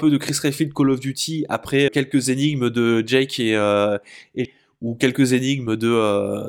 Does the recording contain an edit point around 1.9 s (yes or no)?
yes